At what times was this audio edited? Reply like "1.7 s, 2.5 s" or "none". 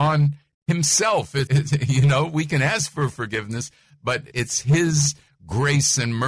1.5 s, 4.3 s